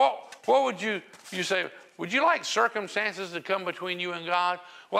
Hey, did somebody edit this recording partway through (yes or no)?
no